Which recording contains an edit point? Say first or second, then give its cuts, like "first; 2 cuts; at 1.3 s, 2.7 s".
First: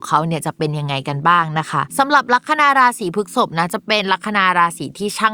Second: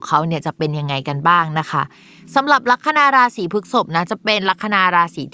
first; 1 cut; at 1.9 s